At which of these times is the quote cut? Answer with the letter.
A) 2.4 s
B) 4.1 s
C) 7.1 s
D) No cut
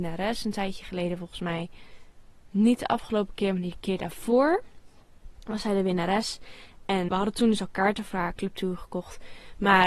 C